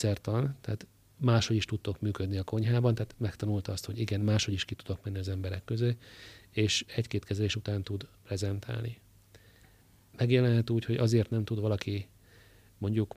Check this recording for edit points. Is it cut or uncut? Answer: uncut